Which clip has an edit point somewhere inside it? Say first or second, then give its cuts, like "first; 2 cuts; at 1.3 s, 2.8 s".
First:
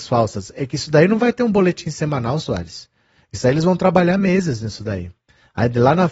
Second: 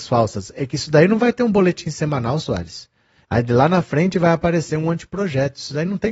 second; 1 cut; at 3.2 s